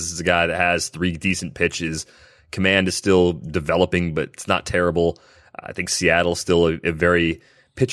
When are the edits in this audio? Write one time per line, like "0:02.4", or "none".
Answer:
none